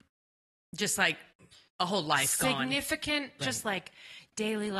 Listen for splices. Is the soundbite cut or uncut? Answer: cut